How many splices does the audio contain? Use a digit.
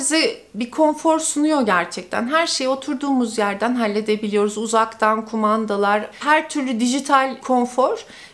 1